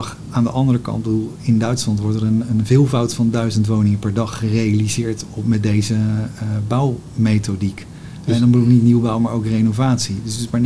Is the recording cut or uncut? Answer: uncut